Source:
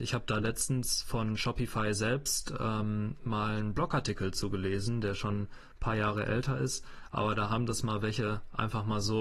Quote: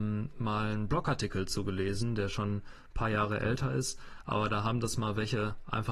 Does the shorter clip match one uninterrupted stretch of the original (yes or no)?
yes